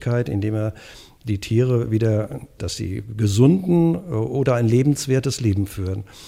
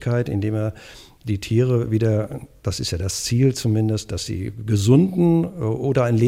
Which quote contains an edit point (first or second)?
first